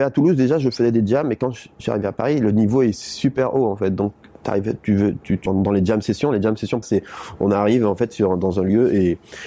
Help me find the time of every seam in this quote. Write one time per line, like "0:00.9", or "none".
0:05.5
0:06.8